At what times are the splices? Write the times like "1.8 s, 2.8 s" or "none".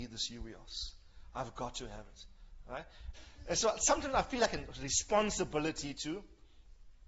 3.1 s

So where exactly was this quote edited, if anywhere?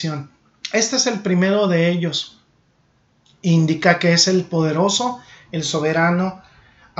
none

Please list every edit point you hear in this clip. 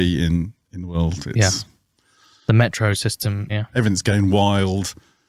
3.5 s

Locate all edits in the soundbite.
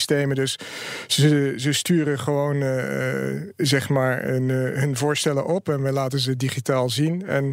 none

